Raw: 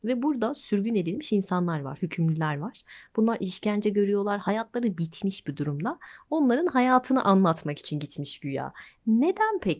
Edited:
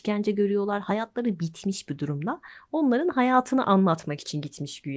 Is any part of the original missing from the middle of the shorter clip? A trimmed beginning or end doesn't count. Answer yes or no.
no